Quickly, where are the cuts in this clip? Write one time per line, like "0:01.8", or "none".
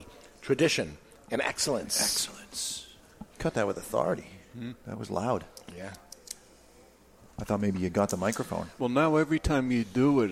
0:03.3
0:08.8

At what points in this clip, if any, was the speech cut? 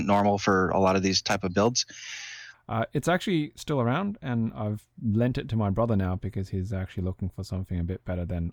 0:02.5

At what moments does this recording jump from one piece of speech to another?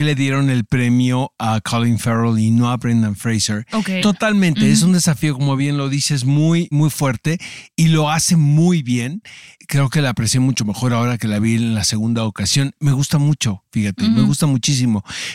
0:04.0
0:06.7
0:09.6

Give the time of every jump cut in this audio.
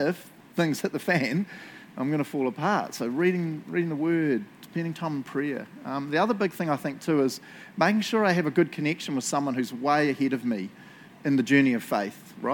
none

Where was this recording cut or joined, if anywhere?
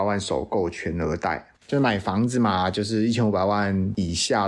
0:01.6

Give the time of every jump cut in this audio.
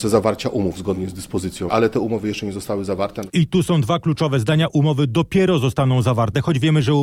0:01.7

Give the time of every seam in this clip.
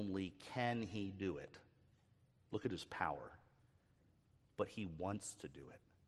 none

